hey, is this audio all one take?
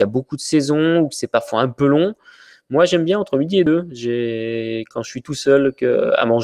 yes; 0 cuts

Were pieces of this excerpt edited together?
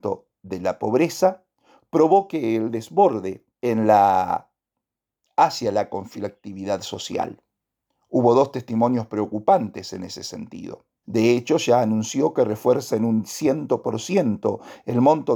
yes; 2 cuts; at 3.5 s, 11.0 s

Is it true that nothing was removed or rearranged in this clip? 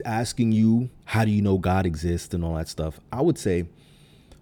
no; 1 cut; at 1.0 s

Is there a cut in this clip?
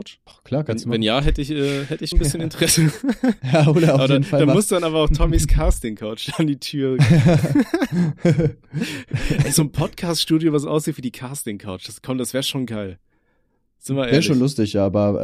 yes; 1 cut; at 2.1 s

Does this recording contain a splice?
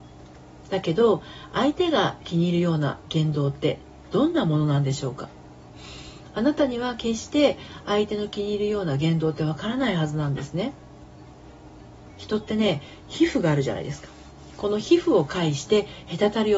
no; 0 cuts

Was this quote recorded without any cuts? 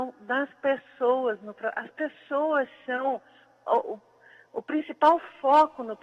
yes; 0 cuts

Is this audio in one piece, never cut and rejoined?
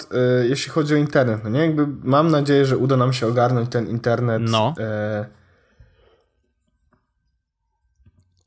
yes; 0 cuts

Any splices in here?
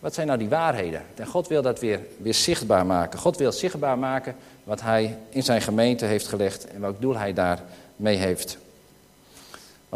yes; 1 cut; at 1.2 s

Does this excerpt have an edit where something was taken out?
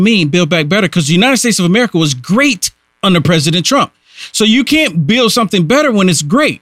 no; 0 cuts

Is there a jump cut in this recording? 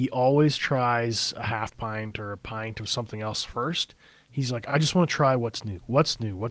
no; 0 cuts

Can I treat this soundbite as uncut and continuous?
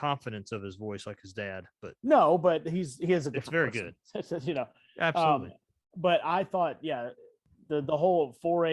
yes; 0 cuts

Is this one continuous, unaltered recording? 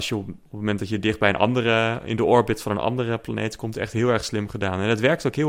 yes; 0 cuts

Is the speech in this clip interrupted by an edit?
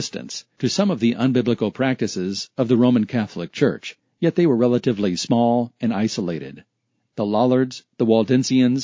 no; 0 cuts

